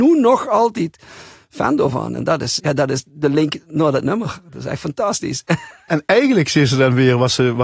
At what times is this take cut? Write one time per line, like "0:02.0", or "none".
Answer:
0:02.6